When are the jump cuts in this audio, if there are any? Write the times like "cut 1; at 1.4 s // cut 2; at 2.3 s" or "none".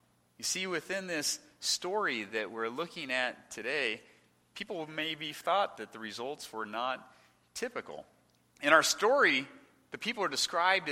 none